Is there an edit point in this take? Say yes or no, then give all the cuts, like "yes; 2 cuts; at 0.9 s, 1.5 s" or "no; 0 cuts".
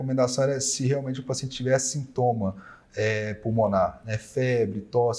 no; 0 cuts